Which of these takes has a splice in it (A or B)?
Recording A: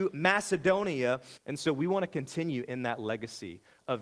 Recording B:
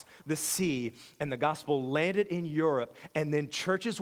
A